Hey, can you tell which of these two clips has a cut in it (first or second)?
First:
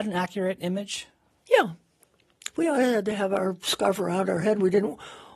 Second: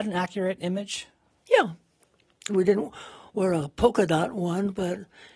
second